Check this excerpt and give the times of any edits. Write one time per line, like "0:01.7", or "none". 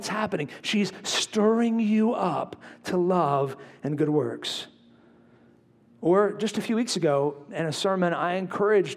none